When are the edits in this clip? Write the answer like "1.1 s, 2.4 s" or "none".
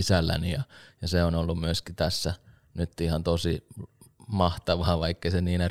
none